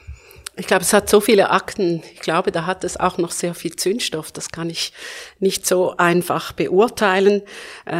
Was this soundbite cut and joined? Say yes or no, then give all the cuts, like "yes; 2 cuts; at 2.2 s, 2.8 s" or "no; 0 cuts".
no; 0 cuts